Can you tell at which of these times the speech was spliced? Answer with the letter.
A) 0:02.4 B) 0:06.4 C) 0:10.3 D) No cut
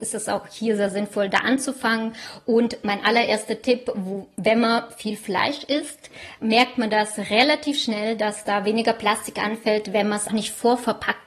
C